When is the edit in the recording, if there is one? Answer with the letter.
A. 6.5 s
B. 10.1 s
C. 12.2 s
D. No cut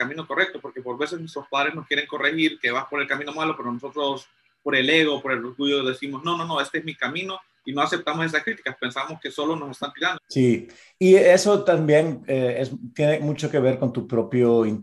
B